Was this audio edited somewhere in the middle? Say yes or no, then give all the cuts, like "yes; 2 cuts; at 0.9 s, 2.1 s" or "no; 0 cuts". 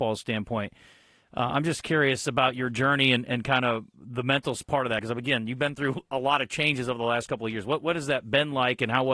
no; 0 cuts